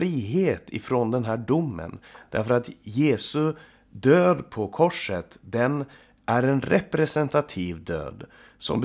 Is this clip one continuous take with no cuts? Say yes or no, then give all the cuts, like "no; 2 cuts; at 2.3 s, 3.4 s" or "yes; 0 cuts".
yes; 0 cuts